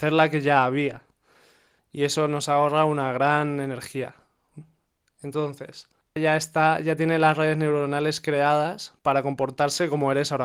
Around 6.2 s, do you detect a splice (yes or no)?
yes